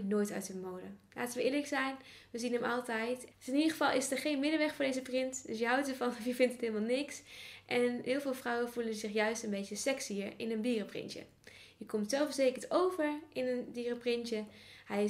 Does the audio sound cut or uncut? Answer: cut